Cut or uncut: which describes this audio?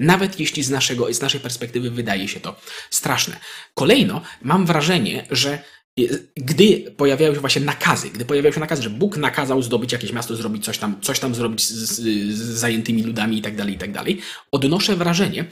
uncut